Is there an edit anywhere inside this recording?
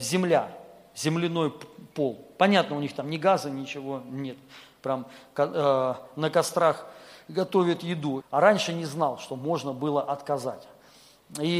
yes; 1 cut; at 8.2 s

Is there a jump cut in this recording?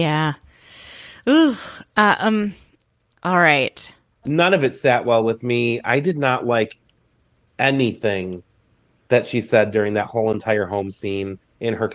yes; 1 cut; at 4.2 s

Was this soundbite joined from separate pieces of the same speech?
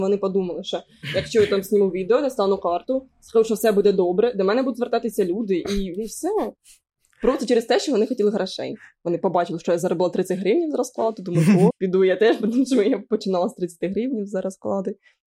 yes; 1 cut; at 11.7 s

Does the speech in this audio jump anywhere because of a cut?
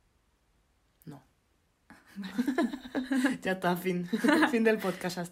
no; 0 cuts

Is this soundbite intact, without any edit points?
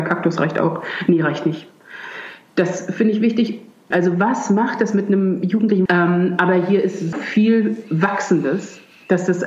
no; 3 cuts; at 3.9 s, 5.9 s, 7.1 s

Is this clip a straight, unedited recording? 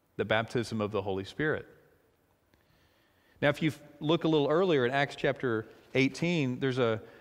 yes; 0 cuts

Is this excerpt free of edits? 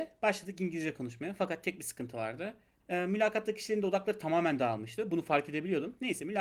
no; 1 cut; at 2.8 s

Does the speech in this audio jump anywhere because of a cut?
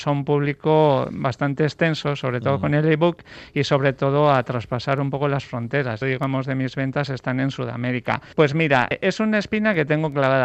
yes; 2 cuts; at 6.0 s, 8.3 s

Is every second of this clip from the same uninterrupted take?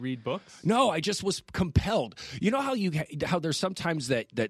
yes; 0 cuts

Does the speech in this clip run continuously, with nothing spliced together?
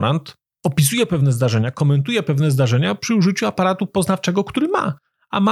yes; 0 cuts

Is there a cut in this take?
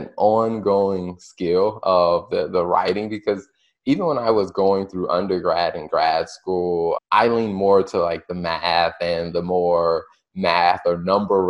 yes; 1 cut; at 7.0 s

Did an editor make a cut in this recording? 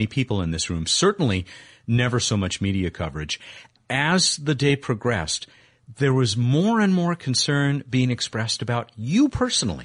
no; 0 cuts

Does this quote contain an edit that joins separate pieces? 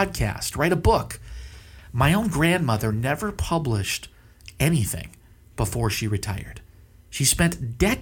no; 0 cuts

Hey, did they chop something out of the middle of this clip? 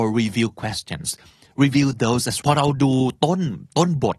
yes; 1 cut; at 2.4 s

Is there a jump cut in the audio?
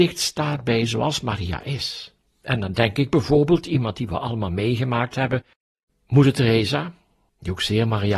yes; 1 cut; at 2.2 s

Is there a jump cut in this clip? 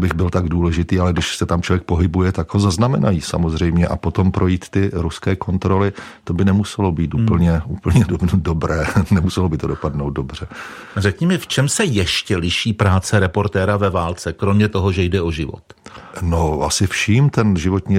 yes; 1 cut; at 16.1 s

